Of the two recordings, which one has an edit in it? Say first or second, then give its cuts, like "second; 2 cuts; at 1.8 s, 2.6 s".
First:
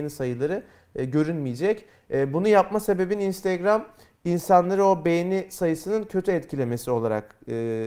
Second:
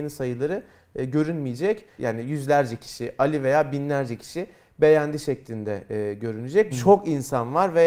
second; 2 cuts; at 2.0 s, 6.7 s